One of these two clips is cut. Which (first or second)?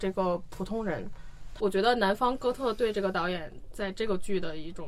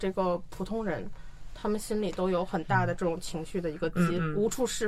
first